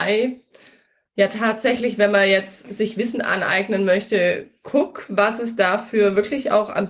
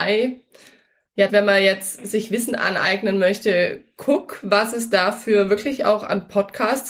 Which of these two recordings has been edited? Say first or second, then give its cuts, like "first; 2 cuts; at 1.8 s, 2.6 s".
second; 1 cut; at 1.3 s